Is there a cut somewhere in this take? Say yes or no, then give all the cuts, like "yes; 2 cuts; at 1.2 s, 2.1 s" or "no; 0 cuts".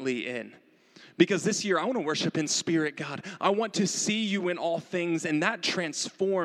no; 0 cuts